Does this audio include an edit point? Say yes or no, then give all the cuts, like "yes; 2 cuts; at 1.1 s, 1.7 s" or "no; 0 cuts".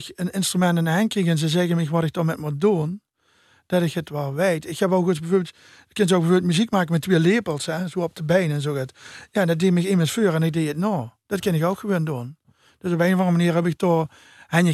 no; 0 cuts